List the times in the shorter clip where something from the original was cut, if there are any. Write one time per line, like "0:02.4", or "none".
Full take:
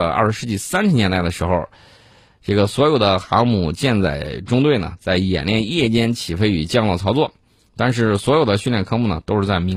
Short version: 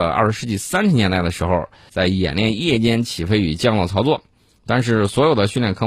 0:01.9